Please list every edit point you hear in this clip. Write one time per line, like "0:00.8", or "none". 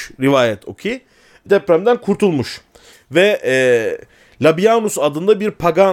0:01.5
0:02.9